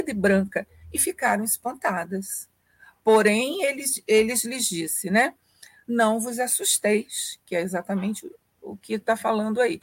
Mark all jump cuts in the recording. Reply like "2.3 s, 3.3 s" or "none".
none